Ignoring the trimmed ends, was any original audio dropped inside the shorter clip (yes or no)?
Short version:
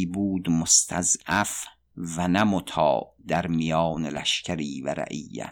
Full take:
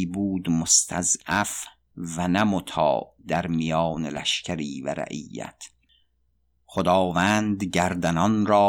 no